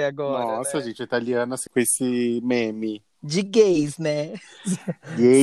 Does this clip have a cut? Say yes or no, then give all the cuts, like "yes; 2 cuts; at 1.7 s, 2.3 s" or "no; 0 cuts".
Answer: yes; 1 cut; at 1.7 s